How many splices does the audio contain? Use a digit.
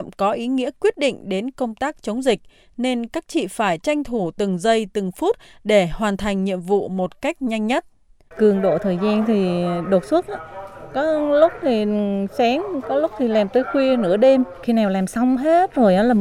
2